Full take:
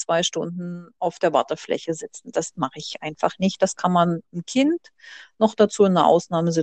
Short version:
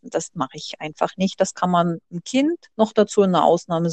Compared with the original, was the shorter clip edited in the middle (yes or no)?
yes